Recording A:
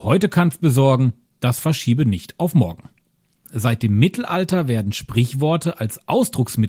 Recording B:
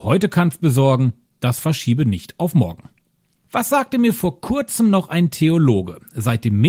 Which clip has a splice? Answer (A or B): A